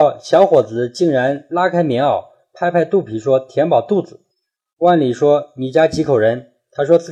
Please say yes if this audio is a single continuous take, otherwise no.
no